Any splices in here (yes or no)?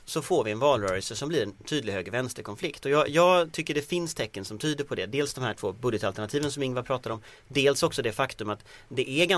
no